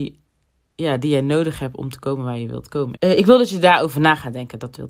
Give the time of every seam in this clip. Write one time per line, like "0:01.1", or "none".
0:03.0